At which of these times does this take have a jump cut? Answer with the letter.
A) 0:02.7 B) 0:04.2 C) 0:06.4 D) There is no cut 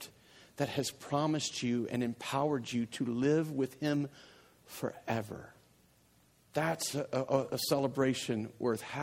C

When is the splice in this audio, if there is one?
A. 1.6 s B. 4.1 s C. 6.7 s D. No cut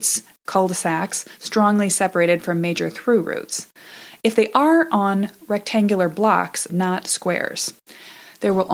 C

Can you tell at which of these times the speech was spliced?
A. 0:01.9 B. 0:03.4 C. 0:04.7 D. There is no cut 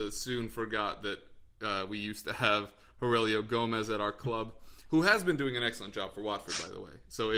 D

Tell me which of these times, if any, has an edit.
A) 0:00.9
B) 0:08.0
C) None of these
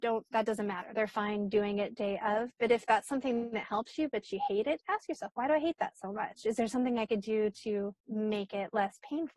B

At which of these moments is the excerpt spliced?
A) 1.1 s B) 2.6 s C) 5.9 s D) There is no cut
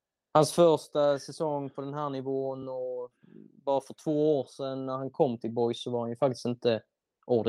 D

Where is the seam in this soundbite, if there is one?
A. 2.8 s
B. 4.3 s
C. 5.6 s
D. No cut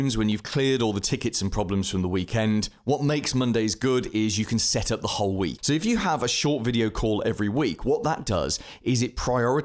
C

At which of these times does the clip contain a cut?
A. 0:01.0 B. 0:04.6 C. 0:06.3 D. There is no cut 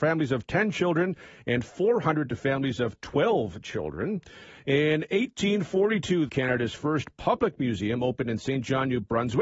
C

